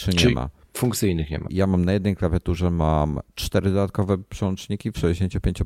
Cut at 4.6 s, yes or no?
no